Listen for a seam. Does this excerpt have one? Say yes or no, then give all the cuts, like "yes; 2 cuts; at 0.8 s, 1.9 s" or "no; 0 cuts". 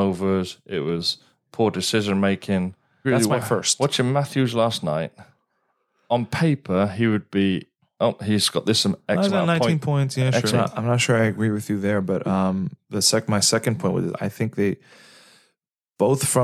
yes; 2 cuts; at 3.0 s, 10.5 s